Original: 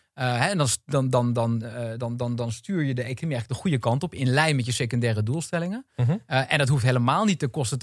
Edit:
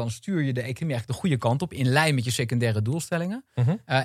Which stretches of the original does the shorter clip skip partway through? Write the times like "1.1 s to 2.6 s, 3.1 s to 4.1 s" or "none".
none